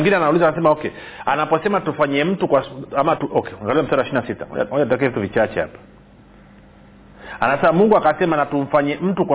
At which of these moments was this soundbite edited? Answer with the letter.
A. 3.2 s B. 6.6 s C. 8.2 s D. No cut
A